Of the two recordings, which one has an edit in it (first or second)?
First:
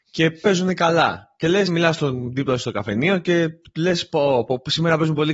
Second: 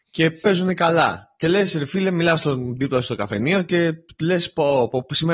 first